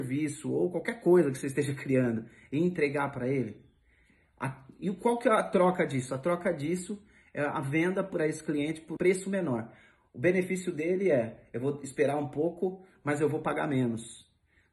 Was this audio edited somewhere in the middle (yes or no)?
yes